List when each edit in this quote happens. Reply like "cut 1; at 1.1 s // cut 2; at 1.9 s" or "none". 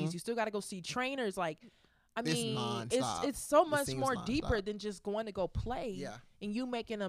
none